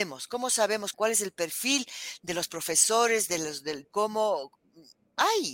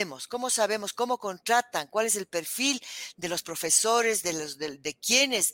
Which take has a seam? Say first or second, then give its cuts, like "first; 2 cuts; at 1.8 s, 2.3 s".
first; 2 cuts; at 0.9 s, 3.8 s